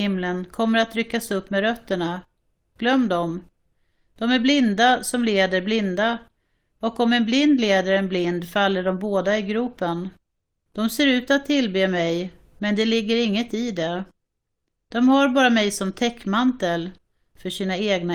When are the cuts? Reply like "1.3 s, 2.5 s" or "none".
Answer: 10.7 s